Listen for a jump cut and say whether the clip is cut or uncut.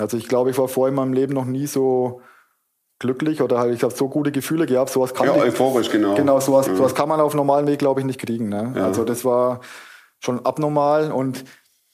cut